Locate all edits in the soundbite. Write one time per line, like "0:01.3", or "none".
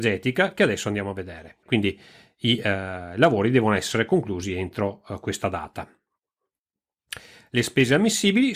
0:01.6